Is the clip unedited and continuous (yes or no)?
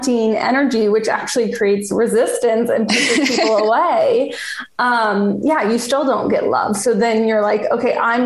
yes